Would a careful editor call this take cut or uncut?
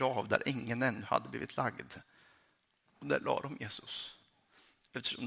uncut